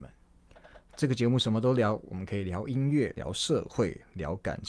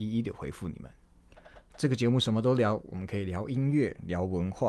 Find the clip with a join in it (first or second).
first